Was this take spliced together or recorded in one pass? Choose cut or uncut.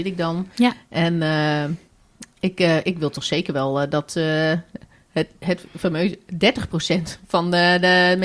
uncut